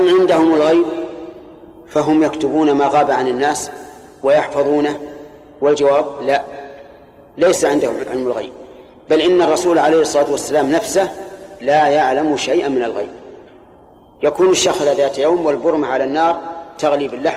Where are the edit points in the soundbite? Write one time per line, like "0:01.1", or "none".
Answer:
none